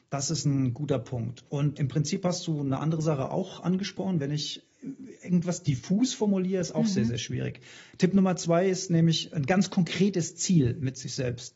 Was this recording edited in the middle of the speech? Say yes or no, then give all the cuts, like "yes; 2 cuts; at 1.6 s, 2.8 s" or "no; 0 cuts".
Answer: yes; 1 cut; at 1.7 s